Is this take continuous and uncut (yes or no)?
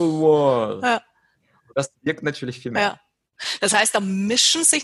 yes